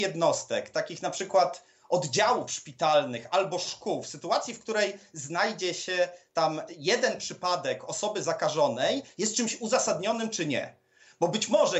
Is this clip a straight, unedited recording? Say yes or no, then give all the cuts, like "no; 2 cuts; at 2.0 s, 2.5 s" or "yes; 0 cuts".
yes; 0 cuts